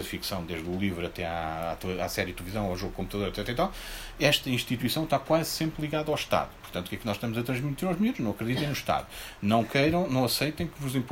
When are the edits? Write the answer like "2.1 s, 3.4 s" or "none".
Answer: none